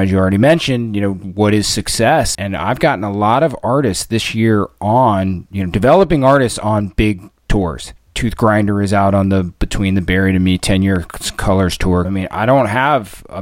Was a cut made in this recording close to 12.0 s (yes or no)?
yes